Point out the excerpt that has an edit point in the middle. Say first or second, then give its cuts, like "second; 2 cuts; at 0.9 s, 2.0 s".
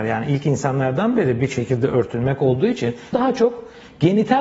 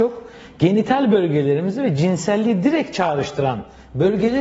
first; 1 cut; at 3.1 s